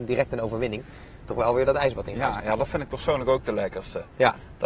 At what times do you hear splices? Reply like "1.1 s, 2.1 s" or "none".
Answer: 1.3 s, 2.4 s